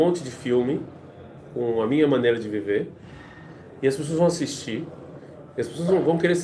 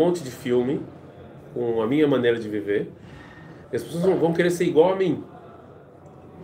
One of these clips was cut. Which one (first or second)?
second